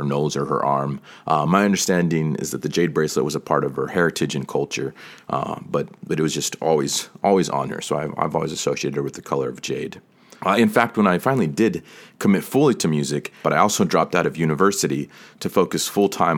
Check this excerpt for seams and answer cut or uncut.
cut